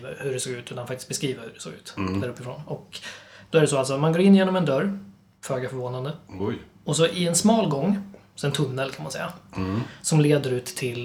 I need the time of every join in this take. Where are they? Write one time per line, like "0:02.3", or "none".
0:08.3